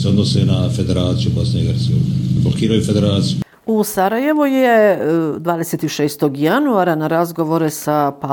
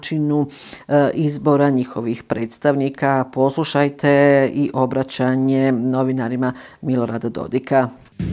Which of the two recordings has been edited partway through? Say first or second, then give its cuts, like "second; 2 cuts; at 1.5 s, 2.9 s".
first; 1 cut; at 2.4 s